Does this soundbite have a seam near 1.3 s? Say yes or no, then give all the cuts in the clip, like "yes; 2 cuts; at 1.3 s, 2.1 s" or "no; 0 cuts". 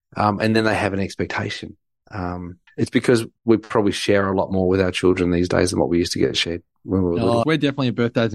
no; 2 cuts; at 2.7 s, 7.4 s